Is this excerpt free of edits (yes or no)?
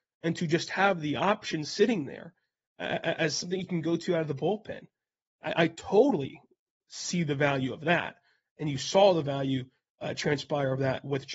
yes